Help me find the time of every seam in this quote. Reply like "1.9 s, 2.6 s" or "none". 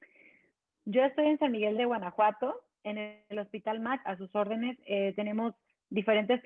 1.7 s, 4.0 s

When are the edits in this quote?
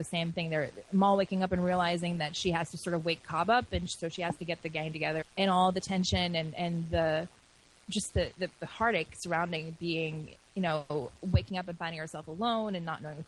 5.2 s

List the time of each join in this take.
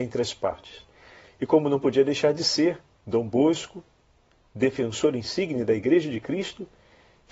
none

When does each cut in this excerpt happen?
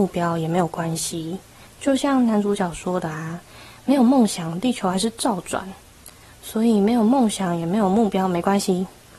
1.7 s

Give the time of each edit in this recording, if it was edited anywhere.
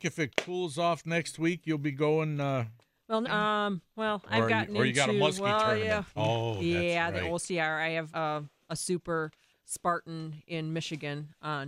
3.2 s, 6.2 s, 8.1 s

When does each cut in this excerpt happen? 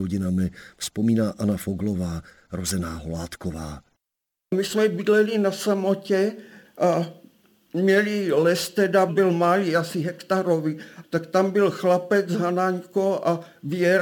9.1 s, 11.0 s

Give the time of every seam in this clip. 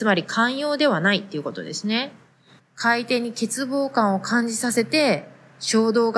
2.6 s

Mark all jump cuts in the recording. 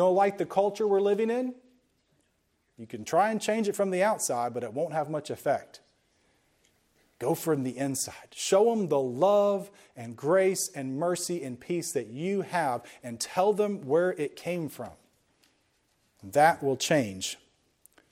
none

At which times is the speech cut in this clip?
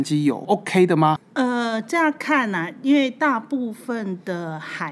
1.2 s

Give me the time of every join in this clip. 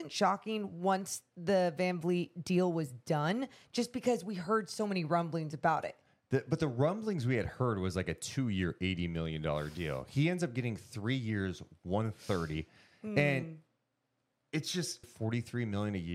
15.0 s

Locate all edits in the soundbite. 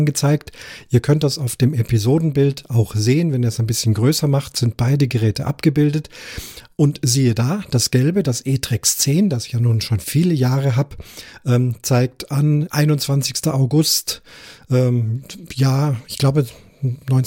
12.7 s

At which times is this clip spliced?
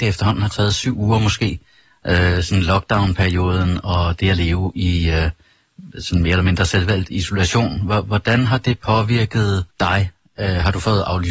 9.7 s

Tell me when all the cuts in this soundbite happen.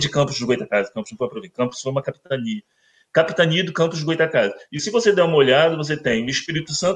none

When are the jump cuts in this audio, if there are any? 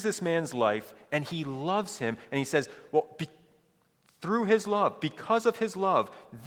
none

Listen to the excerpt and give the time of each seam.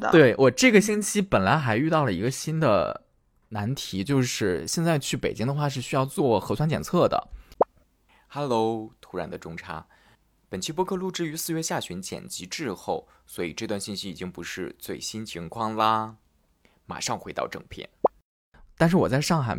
none

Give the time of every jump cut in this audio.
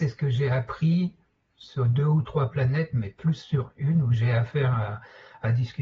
none

